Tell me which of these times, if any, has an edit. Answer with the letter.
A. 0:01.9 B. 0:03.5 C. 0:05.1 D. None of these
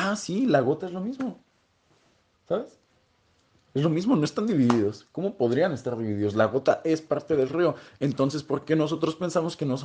D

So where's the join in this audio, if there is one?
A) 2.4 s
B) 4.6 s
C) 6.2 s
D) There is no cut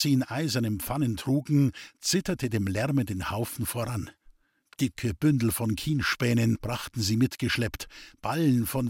D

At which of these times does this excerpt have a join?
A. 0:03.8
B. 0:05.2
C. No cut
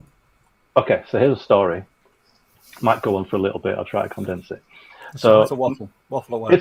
C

